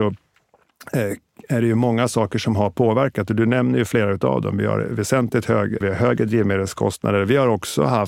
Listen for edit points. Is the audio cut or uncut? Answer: cut